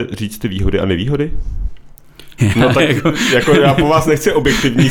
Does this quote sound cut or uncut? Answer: cut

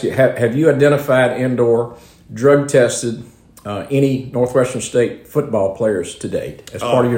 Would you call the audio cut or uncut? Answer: uncut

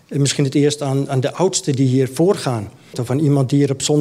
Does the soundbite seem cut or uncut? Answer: cut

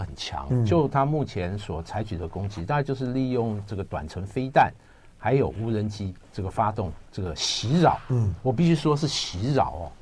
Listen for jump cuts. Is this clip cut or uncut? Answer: uncut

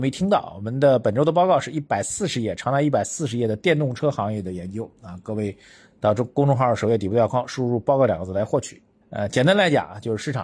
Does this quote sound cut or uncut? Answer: cut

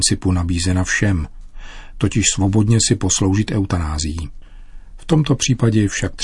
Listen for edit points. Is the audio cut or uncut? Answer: uncut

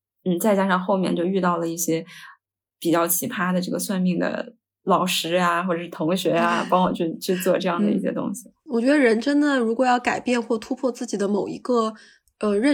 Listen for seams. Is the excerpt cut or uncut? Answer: uncut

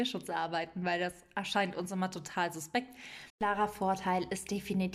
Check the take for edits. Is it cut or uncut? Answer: cut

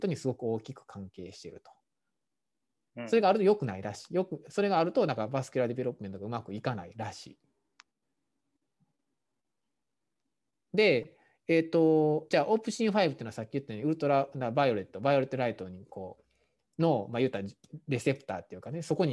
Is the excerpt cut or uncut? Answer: cut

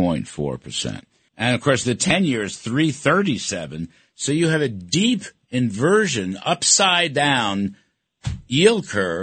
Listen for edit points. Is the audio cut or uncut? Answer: cut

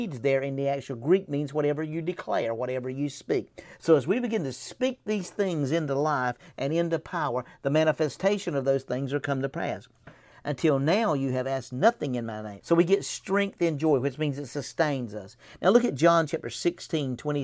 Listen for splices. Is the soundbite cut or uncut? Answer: cut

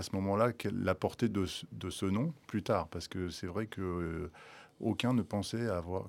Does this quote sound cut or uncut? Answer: uncut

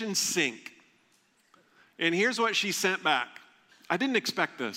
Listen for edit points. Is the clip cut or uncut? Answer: uncut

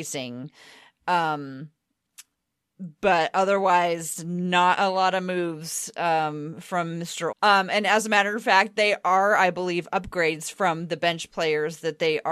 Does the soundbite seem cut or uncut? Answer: cut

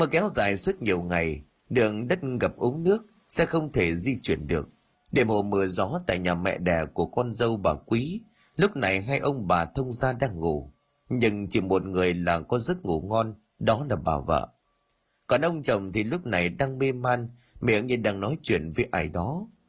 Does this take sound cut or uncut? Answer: cut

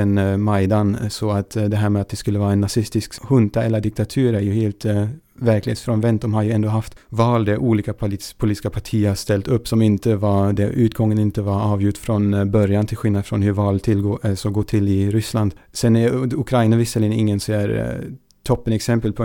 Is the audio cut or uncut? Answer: uncut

